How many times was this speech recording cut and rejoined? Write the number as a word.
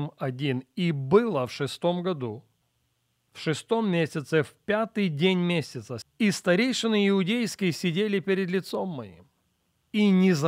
one